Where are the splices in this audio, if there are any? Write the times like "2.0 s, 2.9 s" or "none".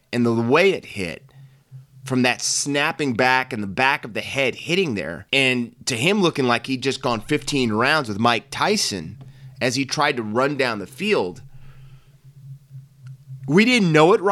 5.3 s